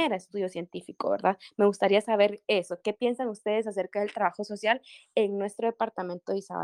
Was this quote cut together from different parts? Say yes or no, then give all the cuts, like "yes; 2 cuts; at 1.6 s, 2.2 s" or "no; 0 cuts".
no; 0 cuts